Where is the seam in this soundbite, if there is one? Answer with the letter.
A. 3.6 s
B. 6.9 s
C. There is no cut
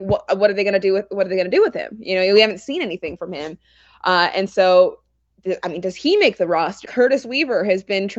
B